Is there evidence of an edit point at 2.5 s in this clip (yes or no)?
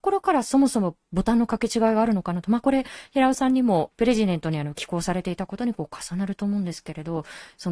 no